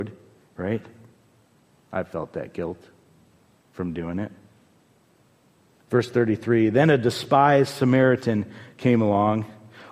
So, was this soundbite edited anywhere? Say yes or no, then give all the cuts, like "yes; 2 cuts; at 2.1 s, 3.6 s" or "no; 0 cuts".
no; 0 cuts